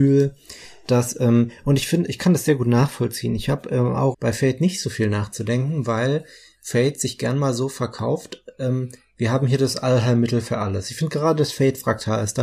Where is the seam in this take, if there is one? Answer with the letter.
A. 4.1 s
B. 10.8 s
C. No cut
A